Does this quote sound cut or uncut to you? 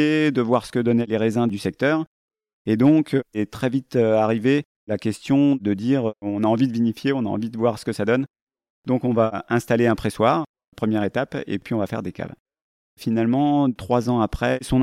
uncut